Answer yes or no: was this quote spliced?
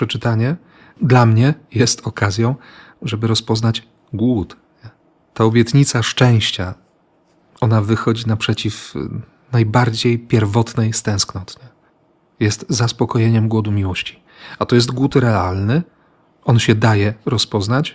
yes